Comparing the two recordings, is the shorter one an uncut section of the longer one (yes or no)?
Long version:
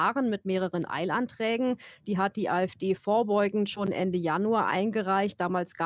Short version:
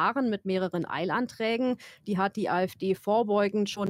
yes